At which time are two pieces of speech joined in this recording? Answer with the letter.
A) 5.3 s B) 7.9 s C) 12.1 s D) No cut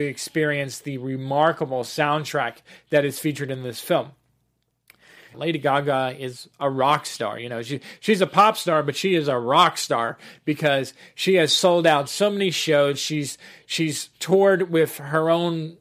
A